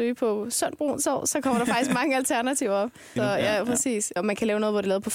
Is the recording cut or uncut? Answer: cut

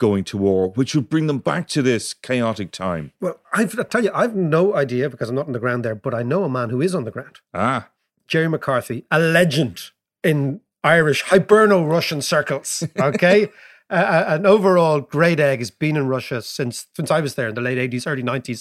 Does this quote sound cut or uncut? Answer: uncut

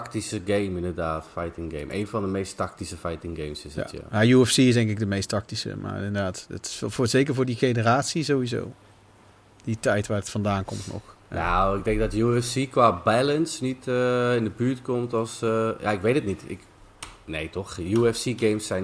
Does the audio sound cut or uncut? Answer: uncut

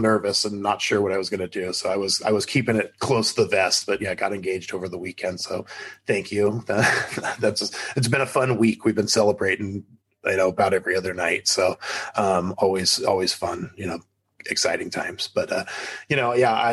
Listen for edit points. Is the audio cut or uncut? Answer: uncut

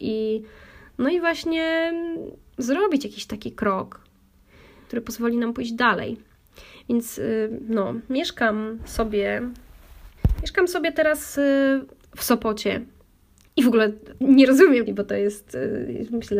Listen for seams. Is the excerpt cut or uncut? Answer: cut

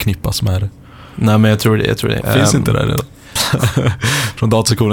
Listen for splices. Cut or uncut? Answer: cut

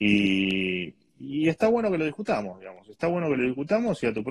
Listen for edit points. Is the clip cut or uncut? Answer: uncut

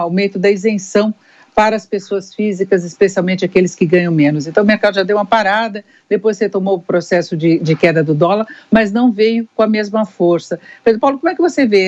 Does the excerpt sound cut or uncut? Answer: uncut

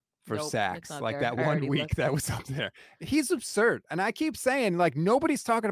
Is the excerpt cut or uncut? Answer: uncut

